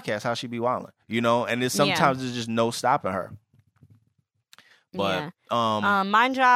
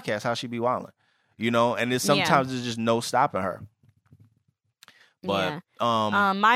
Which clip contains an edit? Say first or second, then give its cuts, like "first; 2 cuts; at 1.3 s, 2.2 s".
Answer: first; 1 cut; at 1.0 s